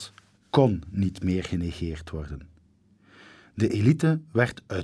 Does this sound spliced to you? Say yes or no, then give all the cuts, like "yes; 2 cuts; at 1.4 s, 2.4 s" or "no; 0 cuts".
no; 0 cuts